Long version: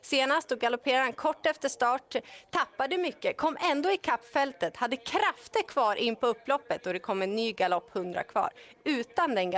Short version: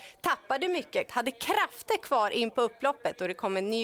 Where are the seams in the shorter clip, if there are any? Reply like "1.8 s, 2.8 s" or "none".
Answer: 1.1 s